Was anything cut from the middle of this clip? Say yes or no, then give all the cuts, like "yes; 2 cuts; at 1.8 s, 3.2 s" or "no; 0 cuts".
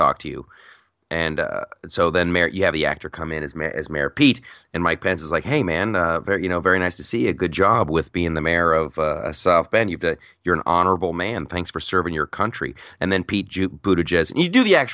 no; 0 cuts